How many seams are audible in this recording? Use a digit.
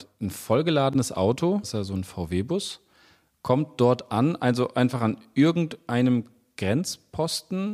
1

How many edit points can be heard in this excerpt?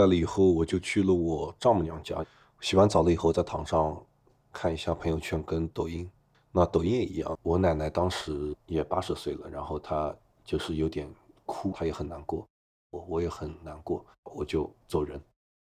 3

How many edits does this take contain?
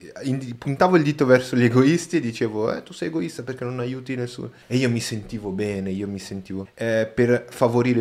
2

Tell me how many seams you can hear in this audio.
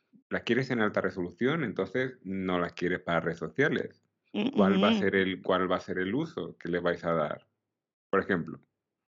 0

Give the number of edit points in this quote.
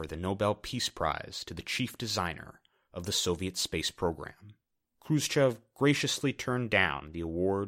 1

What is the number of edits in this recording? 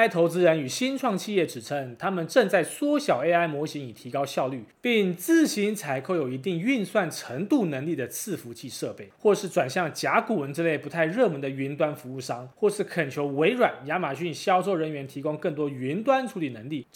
0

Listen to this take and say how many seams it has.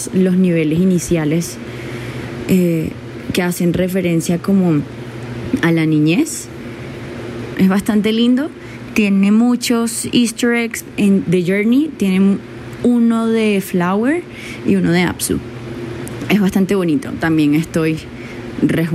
1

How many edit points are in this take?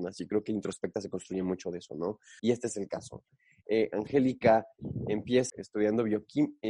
2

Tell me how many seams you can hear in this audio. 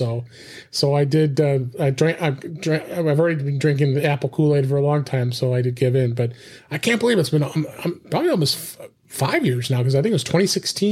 0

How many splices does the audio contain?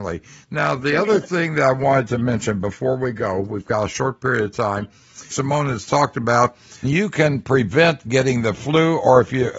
2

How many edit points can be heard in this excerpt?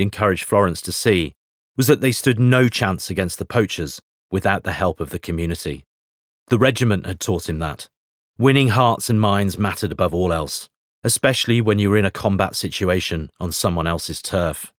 0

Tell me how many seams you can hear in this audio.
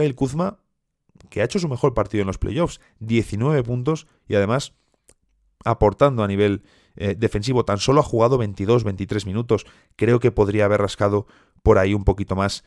0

